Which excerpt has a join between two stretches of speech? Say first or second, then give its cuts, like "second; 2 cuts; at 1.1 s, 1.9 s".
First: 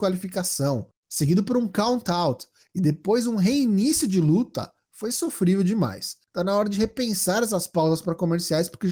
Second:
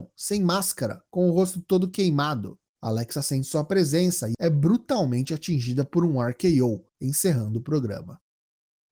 second; 1 cut; at 4.3 s